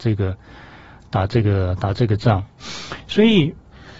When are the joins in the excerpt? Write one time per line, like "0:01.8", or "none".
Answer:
0:03.0